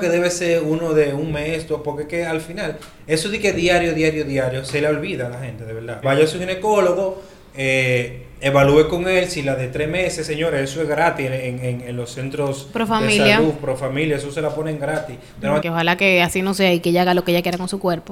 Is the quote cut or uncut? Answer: cut